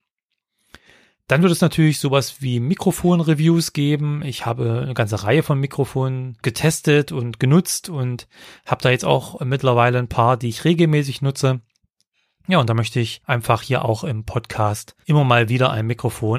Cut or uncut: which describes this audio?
cut